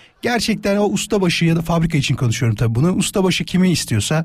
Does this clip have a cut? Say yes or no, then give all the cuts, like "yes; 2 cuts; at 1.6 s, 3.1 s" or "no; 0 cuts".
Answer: no; 0 cuts